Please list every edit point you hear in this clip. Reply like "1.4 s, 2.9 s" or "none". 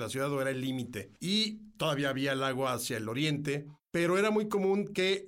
1.2 s

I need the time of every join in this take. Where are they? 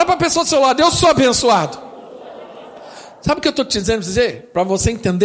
none

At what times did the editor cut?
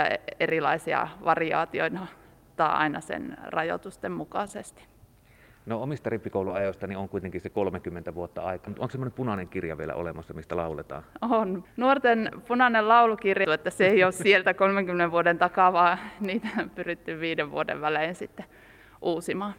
8.7 s, 11.6 s, 13.4 s

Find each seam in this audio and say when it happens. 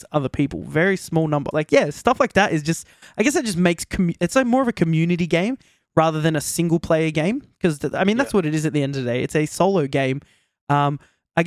1.5 s

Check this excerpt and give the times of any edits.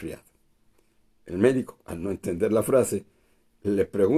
1.8 s

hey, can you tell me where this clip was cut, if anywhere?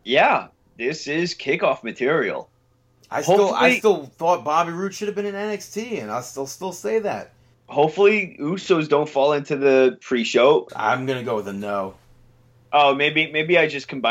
7.5 s, 10.7 s

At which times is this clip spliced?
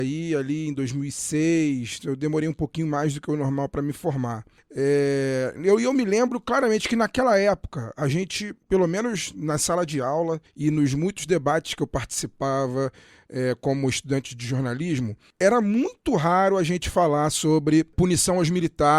none

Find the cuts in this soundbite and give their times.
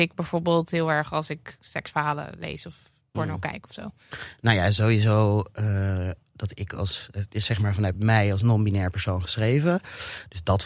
none

